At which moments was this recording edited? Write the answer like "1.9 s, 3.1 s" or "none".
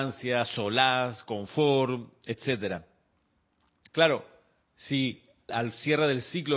3.9 s, 5.5 s